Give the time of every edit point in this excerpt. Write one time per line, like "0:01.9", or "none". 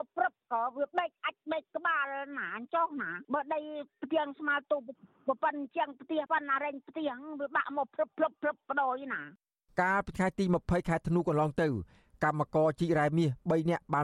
0:06.3